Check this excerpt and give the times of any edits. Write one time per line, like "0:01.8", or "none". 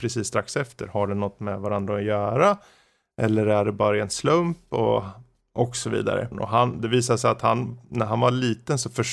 0:06.3